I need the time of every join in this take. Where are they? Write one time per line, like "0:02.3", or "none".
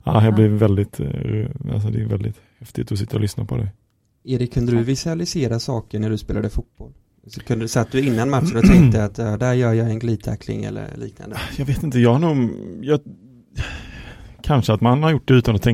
none